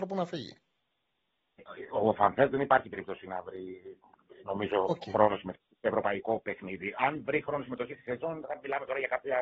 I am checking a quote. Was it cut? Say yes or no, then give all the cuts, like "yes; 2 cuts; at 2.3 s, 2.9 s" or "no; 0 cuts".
no; 0 cuts